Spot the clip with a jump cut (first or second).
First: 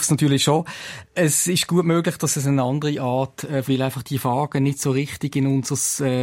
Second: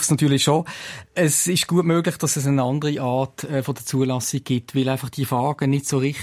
first